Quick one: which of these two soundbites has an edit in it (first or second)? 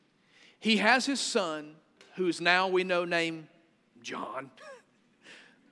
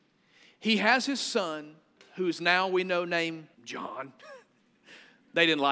second